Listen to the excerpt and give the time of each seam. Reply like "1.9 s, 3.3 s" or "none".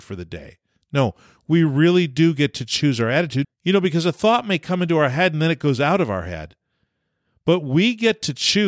3.4 s